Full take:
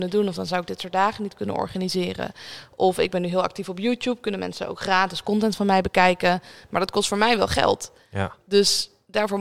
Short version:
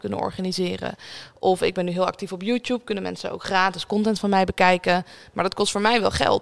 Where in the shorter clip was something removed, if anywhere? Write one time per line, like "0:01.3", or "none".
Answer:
none